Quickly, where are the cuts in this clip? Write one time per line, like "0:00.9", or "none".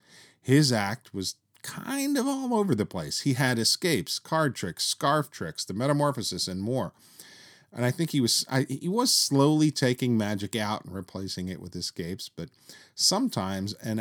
none